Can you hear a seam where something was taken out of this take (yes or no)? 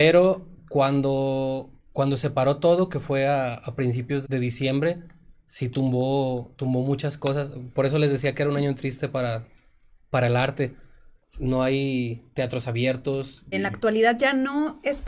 yes